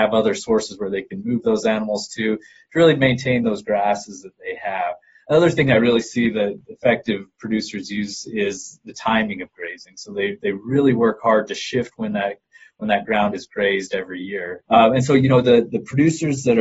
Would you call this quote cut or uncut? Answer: cut